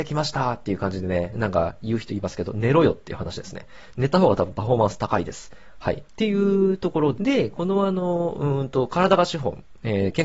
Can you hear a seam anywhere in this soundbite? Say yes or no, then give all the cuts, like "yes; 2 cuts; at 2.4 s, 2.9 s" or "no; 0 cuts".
yes; 1 cut; at 7.1 s